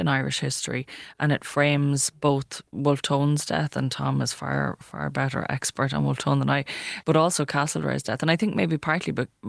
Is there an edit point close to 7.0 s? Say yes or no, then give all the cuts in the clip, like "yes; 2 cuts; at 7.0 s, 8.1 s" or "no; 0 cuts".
yes; 1 cut; at 7.0 s